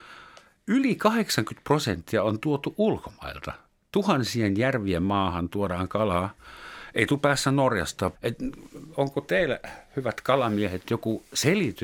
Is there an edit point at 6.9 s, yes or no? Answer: no